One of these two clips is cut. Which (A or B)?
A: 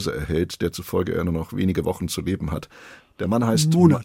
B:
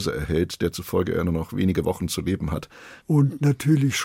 B